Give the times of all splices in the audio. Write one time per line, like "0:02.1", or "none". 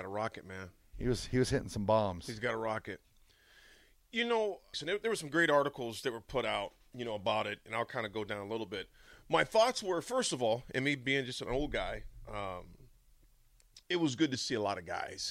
0:04.7
0:13.8

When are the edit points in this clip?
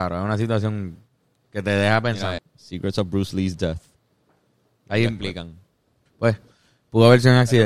0:02.4
0:06.1

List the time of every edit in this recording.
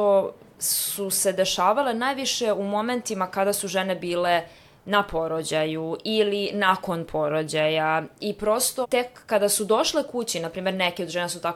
0:08.8

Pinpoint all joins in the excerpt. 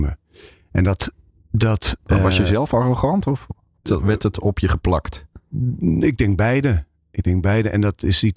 0:03.8

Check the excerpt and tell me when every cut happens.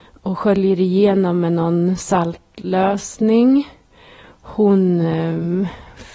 none

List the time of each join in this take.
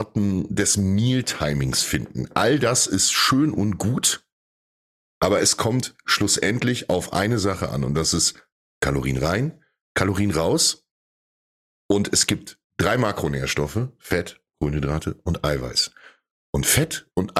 none

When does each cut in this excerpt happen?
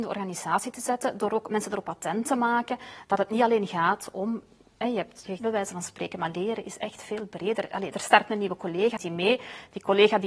0:05.4
0:09.0

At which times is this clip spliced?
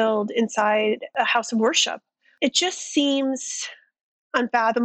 none

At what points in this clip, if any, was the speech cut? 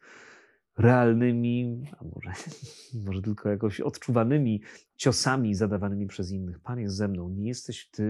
none

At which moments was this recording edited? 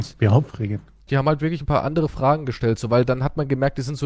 0:01.1

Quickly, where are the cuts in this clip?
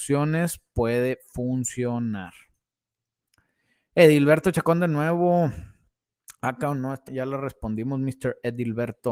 0:07.1

